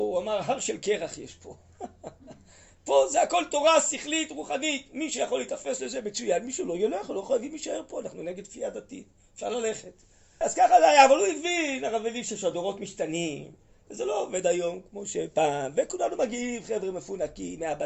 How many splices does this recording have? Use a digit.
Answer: 1